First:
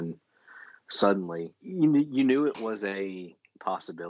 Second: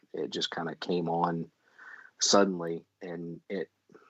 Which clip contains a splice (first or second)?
first